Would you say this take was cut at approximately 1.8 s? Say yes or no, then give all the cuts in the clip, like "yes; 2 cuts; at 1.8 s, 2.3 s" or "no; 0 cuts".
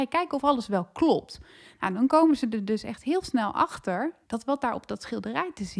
no; 1 cut; at 4.2 s